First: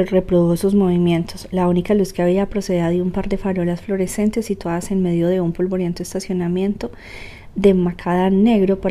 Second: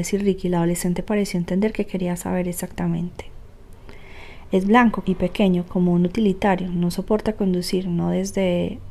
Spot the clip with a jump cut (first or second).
second